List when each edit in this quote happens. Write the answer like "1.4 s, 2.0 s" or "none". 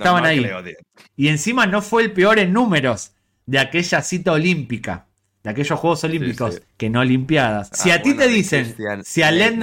7.7 s